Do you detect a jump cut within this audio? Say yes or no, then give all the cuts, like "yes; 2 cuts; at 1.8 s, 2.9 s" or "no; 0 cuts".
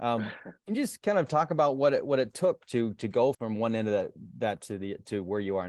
yes; 1 cut; at 3.3 s